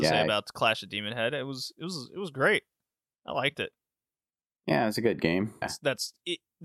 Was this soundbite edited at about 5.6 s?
yes; 1 cut; at 5.6 s

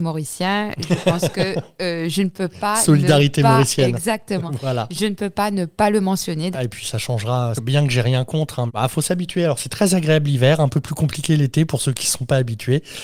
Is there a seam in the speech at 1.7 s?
no; 3 cuts; at 6.5 s, 7.6 s, 8.7 s

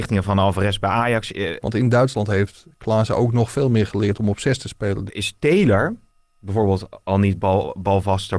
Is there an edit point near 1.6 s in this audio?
yes; 2 cuts; at 1.6 s, 5.1 s

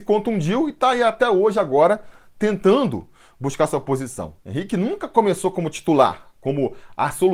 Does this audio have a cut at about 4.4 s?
yes; 1 cut; at 4.4 s

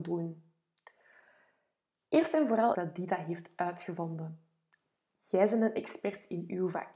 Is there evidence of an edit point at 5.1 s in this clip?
no; 1 cut; at 2.7 s

